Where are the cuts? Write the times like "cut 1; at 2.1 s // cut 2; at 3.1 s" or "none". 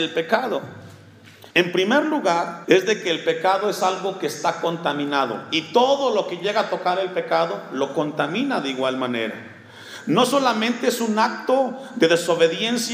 cut 1; at 1.5 s // cut 2; at 2.6 s